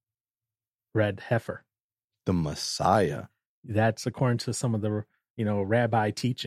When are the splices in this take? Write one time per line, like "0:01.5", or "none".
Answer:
none